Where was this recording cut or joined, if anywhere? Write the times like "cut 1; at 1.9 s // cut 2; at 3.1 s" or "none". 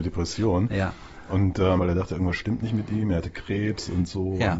cut 1; at 1.8 s